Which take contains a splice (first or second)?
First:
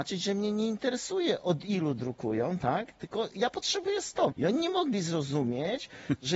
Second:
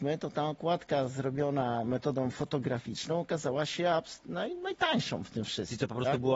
first